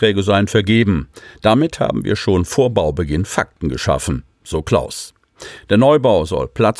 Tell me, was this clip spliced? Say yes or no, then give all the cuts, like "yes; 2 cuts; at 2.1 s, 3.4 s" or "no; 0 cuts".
no; 0 cuts